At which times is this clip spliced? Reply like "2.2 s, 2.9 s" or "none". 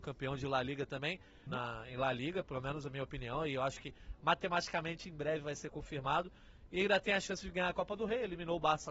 1.5 s